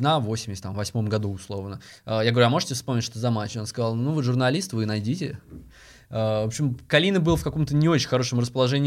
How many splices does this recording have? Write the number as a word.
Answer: zero